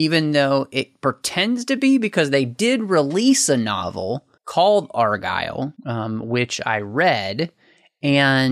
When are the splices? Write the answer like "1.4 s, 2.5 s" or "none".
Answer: 4.4 s, 5.8 s